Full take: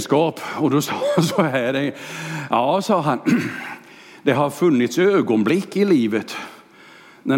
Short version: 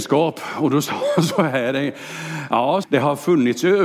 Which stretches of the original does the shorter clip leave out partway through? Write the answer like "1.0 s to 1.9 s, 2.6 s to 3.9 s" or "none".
2.8 s to 4.2 s